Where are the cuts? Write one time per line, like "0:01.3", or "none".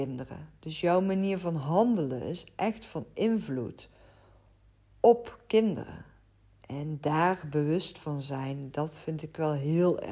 none